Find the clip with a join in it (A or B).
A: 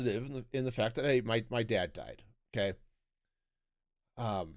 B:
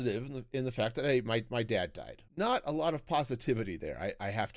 B